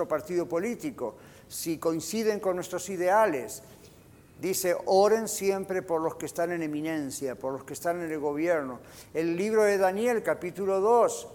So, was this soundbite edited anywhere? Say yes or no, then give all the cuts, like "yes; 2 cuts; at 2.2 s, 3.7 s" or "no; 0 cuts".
no; 0 cuts